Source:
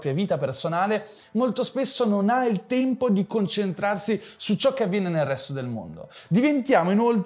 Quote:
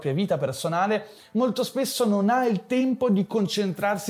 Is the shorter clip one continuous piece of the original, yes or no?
yes